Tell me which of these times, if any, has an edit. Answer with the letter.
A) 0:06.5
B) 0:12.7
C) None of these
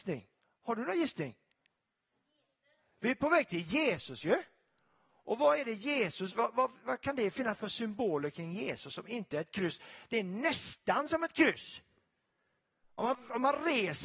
C